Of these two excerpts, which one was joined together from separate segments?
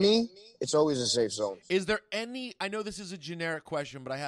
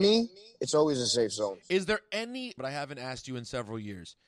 second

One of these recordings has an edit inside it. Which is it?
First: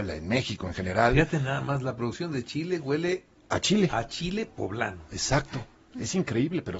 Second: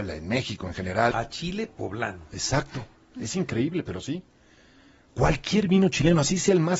second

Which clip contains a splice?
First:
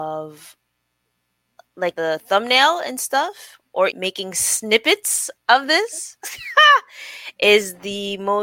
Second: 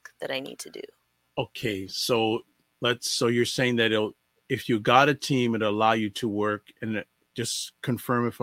first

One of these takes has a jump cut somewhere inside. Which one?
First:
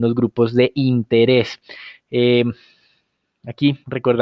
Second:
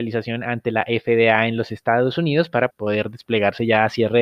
second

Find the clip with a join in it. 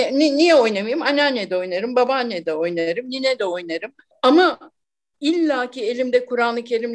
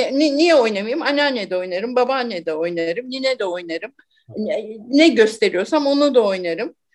first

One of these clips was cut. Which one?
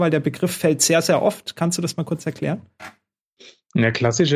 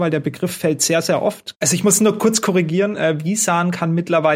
second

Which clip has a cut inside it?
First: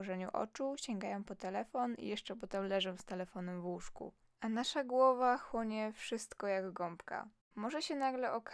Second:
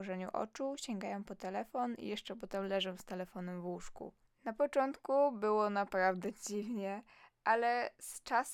second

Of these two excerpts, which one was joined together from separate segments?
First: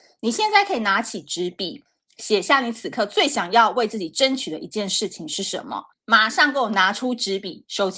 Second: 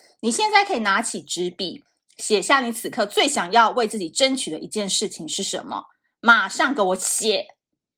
first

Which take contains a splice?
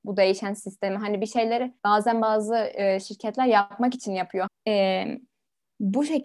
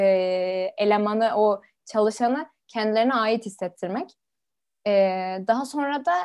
first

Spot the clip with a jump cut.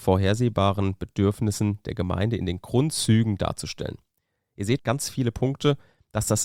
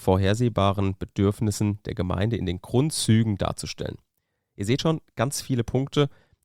first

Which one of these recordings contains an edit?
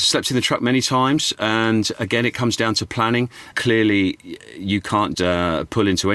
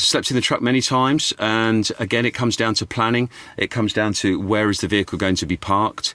first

